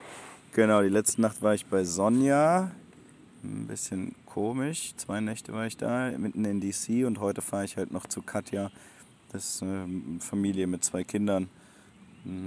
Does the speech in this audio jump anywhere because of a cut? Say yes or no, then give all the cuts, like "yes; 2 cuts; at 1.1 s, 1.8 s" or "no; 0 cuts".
no; 0 cuts